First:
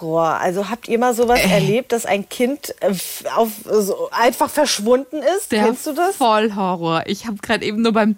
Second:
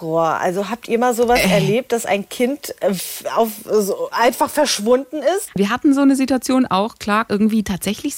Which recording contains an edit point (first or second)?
second